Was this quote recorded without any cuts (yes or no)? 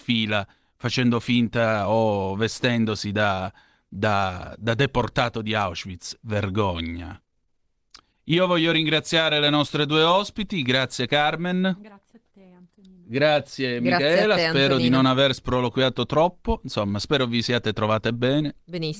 yes